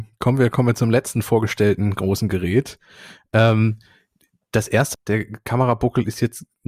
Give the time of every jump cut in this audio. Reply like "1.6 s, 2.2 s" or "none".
4.9 s

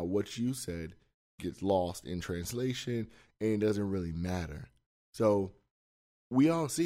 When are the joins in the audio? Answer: none

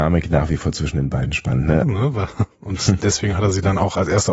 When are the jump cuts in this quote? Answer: 1.8 s

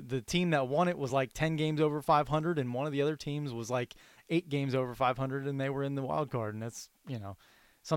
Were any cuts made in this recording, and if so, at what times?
none

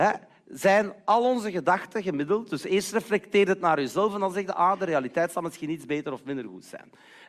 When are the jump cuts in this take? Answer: none

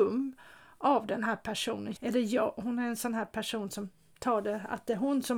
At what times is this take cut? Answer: 2.0 s

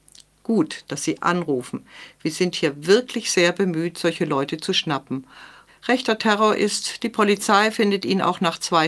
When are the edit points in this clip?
5.7 s

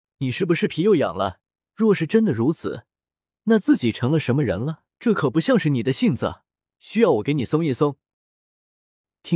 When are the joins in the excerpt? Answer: 1.6 s, 4.9 s, 6.8 s

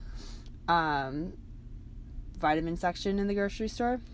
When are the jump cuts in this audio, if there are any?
2.3 s

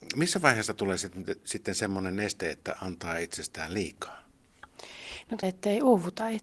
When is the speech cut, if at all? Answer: 5.4 s

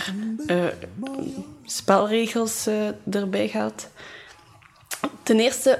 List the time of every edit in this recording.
none

